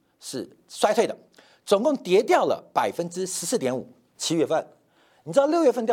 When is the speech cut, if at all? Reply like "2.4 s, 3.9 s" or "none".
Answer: 4.1 s